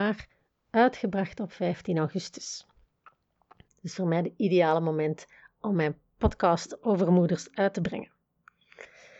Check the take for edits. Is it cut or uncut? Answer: cut